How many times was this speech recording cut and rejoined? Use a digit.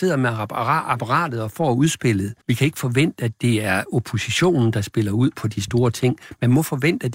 1